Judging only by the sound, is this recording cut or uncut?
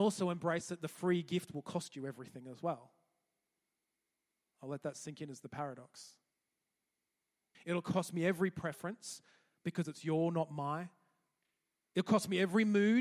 cut